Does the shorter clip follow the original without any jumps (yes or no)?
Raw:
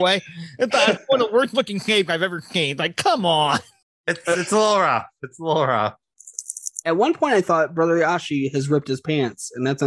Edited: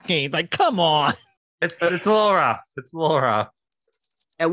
yes